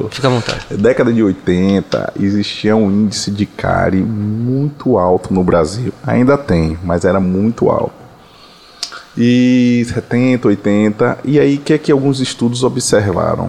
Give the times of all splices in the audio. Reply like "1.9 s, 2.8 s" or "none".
none